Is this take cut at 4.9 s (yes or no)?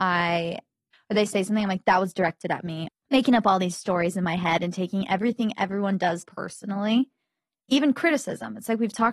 no